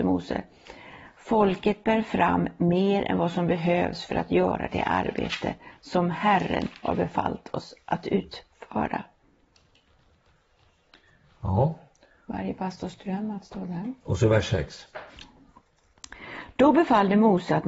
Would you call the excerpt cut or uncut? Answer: uncut